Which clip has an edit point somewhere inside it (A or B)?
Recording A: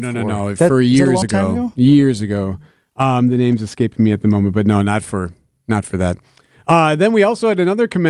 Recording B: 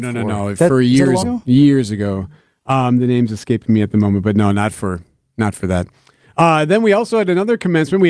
B